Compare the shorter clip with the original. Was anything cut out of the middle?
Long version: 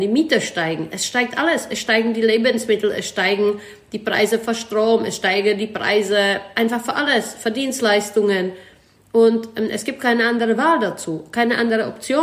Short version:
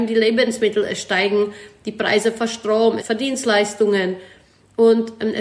yes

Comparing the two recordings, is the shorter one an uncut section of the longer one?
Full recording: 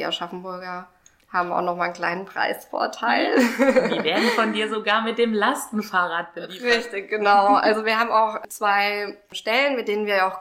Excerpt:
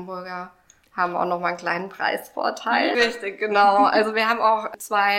no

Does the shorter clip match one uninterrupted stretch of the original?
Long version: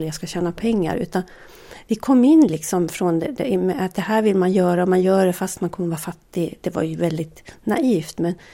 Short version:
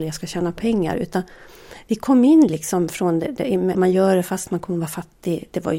no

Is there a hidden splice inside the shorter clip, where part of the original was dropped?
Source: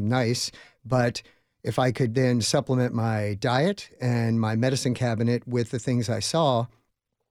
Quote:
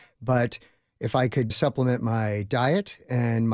yes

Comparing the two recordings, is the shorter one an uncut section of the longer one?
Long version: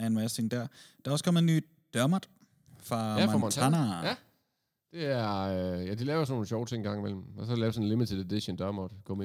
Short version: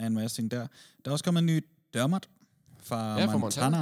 yes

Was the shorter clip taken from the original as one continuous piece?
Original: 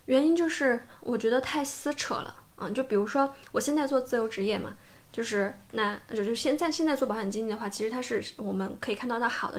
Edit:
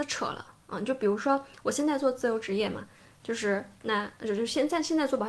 yes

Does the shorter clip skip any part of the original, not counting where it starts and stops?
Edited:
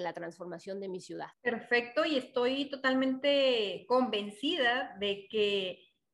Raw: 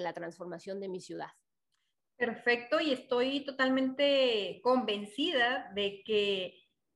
yes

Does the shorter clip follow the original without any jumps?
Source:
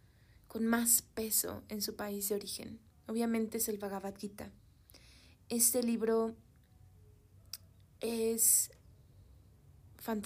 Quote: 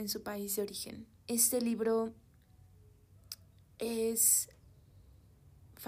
no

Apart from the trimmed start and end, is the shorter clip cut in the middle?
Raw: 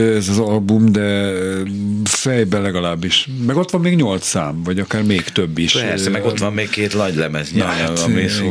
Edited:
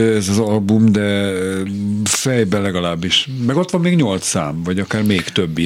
no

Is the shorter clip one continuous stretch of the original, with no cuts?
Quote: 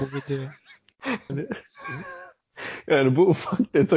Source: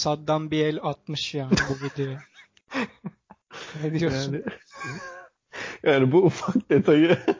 no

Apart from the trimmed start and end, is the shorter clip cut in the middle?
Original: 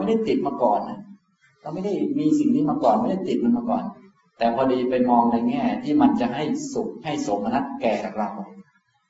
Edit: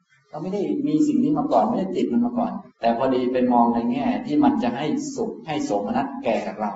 yes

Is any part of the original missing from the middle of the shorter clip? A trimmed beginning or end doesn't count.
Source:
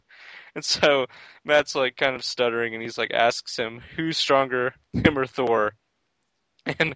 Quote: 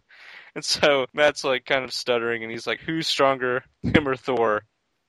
yes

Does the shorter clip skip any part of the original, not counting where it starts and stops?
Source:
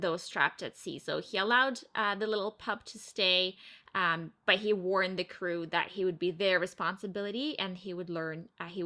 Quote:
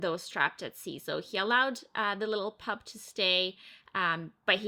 no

